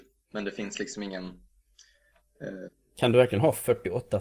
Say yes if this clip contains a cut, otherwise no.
no